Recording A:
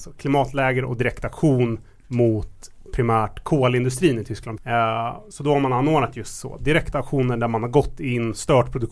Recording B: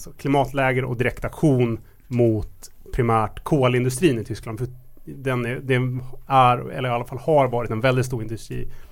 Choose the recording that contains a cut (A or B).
A